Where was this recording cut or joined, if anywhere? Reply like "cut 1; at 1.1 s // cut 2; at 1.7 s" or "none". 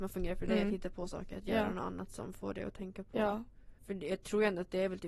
cut 1; at 3.8 s